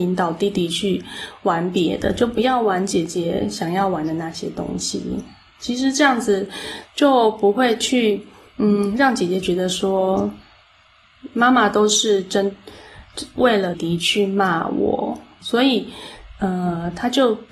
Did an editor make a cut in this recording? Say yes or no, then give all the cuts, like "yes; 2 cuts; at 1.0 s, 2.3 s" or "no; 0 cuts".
yes; 2 cuts; at 13.7 s, 15.4 s